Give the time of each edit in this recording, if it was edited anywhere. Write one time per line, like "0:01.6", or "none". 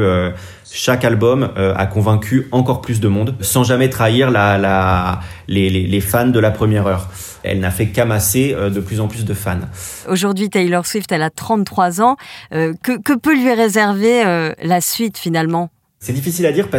none